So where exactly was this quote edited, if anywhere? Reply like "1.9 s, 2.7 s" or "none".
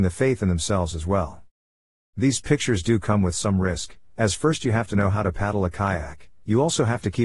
none